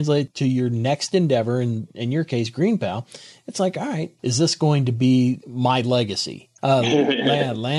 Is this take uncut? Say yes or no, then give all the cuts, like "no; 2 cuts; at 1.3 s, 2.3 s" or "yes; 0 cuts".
no; 1 cut; at 6.6 s